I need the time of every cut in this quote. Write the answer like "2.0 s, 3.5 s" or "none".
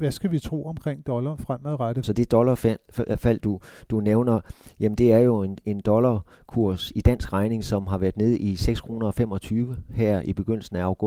2.0 s